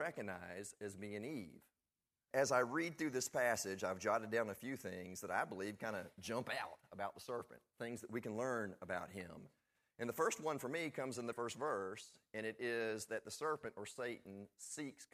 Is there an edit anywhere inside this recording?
yes; 2 cuts; at 2.3 s, 11.3 s

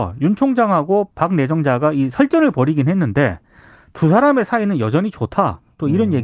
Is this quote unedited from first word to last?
no; 1 cut; at 1.1 s

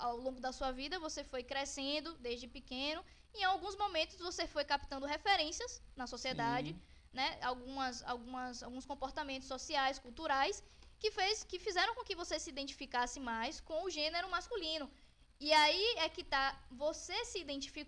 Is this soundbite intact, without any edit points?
yes; 0 cuts

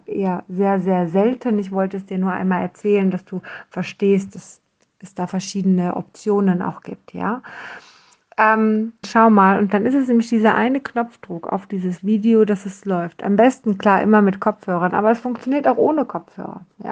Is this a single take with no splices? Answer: no; 1 cut; at 9.0 s

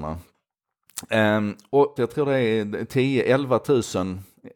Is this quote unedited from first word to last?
no; 1 cut; at 2.0 s

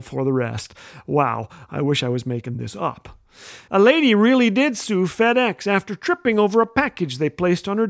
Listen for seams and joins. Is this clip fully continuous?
no; 1 cut; at 3.7 s

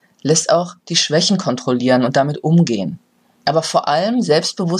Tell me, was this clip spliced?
no; 0 cuts

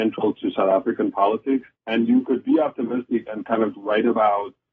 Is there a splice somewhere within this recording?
yes; 2 cuts; at 1.8 s, 3.7 s

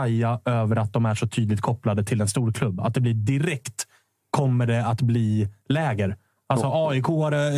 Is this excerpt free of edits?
yes; 0 cuts

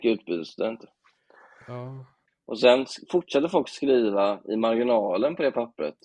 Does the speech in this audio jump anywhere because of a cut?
yes; 1 cut; at 2.3 s

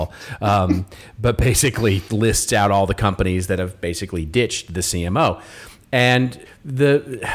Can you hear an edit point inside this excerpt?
yes; 2 cuts; at 2.1 s, 6.4 s

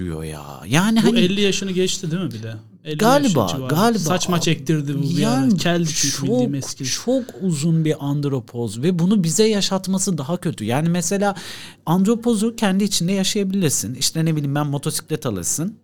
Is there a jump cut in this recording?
no; 0 cuts

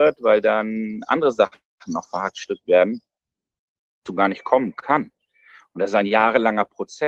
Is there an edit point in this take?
no; 0 cuts

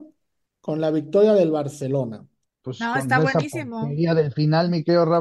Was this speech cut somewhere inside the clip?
yes; 1 cut; at 2.5 s

